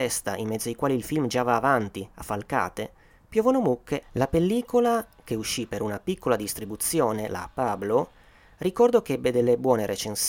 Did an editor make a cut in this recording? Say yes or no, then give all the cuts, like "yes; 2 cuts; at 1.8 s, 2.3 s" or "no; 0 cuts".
yes; 1 cut; at 4.0 s